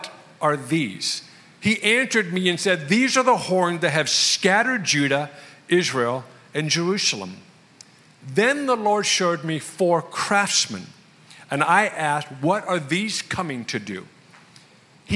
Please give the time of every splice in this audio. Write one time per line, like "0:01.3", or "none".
none